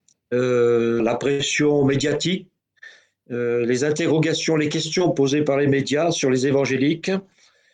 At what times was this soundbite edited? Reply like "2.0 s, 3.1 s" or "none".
1.0 s